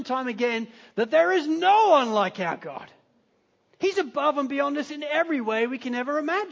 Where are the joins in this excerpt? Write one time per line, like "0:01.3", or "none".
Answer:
none